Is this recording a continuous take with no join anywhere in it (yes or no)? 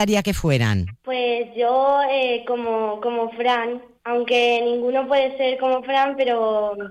no